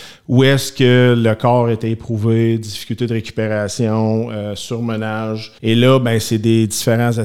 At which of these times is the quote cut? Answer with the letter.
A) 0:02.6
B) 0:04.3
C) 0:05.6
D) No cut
C